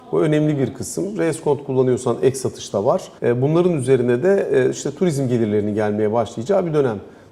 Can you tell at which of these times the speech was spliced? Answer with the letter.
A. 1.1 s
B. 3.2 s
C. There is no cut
B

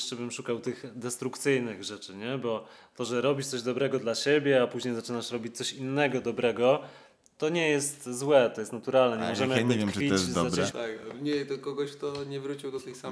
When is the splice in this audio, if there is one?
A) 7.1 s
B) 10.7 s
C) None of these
B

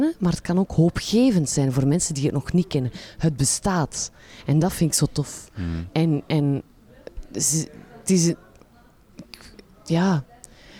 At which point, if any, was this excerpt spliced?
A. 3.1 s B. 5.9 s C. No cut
B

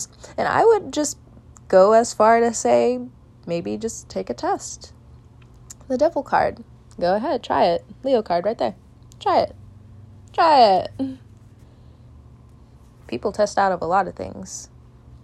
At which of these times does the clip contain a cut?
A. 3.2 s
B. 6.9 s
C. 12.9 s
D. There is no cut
D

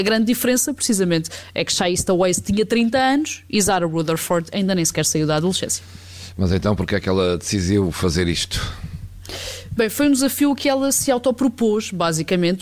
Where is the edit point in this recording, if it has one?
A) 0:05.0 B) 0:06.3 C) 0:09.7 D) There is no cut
D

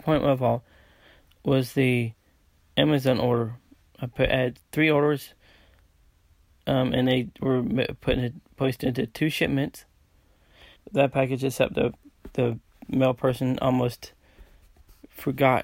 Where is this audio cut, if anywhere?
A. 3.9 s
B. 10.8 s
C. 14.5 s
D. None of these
B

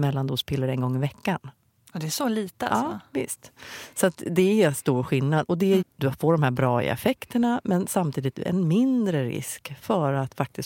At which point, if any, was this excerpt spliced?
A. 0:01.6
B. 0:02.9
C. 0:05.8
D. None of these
C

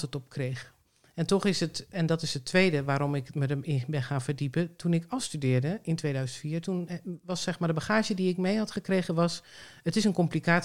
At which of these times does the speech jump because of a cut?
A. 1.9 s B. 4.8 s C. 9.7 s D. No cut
A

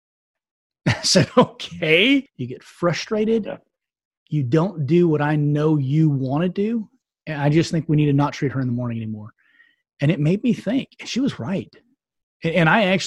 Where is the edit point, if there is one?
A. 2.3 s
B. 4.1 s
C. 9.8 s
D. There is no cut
A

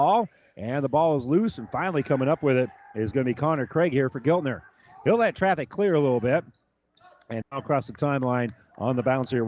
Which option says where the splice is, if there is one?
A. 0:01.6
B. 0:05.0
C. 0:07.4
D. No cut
C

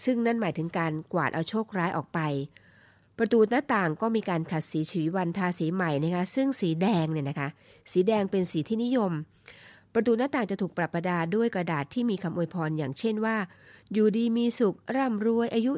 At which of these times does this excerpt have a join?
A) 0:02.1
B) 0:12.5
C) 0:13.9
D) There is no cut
D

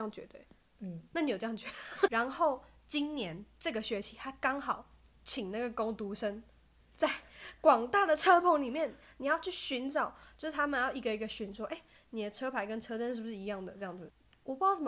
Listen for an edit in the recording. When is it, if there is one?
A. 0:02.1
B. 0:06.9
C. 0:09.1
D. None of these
A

